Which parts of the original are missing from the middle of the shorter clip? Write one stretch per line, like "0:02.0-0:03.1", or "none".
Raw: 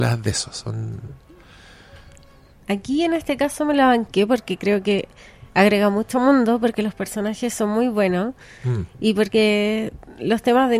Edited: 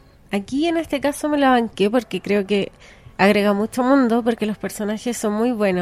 none